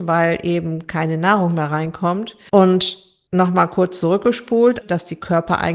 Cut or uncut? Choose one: cut